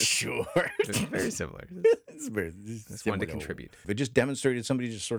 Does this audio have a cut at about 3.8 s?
yes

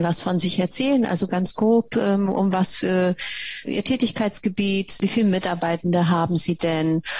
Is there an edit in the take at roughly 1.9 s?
no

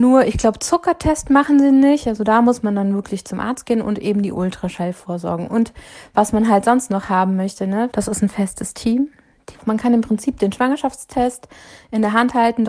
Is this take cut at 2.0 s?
no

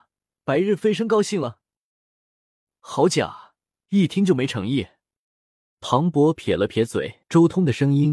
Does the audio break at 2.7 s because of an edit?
no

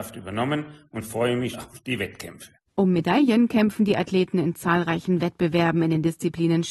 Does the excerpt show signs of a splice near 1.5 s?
yes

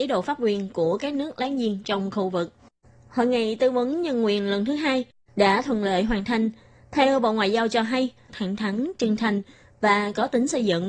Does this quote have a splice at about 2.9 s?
no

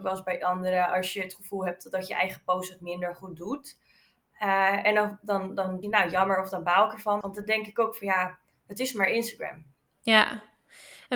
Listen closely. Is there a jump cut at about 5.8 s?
yes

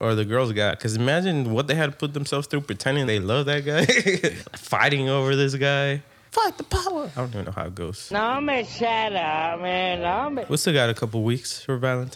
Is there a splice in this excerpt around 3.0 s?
yes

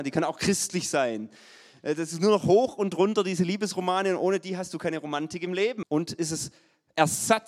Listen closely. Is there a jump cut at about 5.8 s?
yes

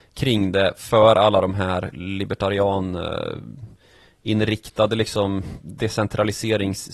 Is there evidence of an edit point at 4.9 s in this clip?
no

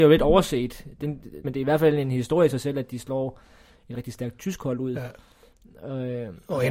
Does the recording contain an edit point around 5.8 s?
no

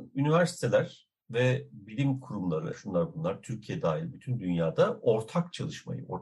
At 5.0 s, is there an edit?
no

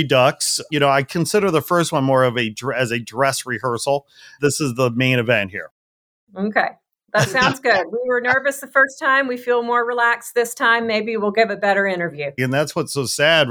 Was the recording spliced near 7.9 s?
no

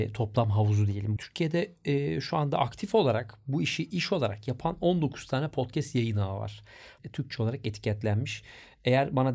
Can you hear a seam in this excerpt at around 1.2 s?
yes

